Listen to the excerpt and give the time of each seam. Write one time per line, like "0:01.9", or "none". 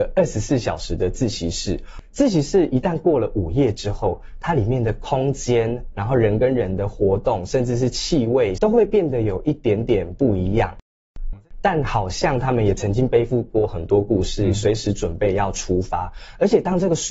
0:08.6
0:11.3

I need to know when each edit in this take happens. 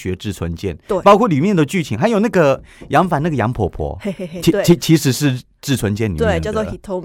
none

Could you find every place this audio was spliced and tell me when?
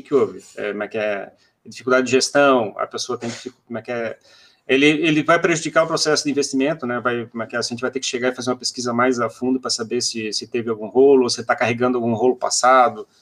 none

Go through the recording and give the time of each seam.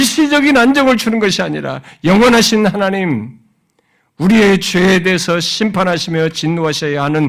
none

